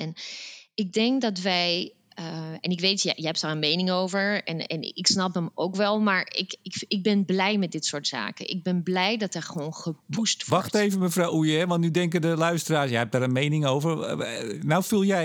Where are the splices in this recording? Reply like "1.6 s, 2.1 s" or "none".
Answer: none